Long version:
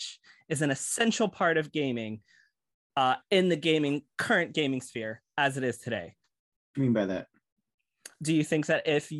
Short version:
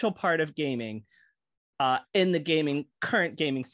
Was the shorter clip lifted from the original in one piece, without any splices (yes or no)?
yes